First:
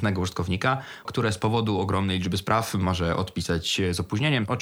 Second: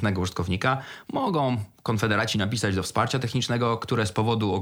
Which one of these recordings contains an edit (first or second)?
first